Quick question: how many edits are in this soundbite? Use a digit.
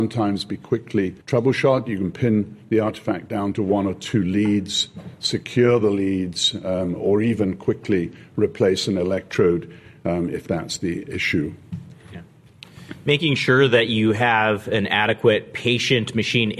1